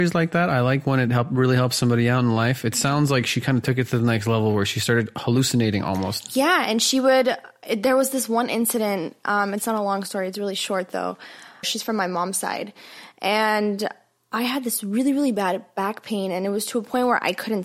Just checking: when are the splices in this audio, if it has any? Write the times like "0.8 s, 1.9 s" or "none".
11.6 s